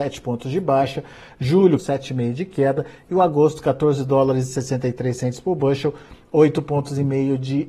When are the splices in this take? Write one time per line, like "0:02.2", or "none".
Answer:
0:01.8